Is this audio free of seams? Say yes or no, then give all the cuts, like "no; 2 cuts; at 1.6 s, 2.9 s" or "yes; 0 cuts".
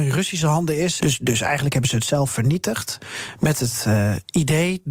no; 1 cut; at 1.0 s